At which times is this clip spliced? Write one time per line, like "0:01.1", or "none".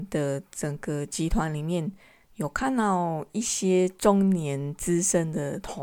none